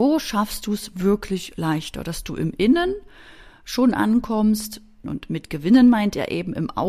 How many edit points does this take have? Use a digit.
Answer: 1